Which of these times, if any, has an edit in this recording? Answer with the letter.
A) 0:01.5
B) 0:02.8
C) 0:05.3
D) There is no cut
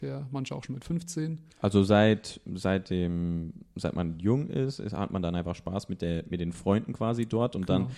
A